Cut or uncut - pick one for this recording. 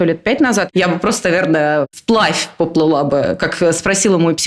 uncut